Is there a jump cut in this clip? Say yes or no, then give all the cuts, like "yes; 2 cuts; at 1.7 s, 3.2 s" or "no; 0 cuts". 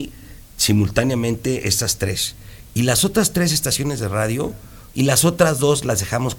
yes; 1 cut; at 4.9 s